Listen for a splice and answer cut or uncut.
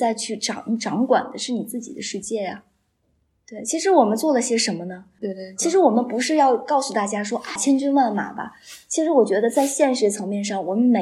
cut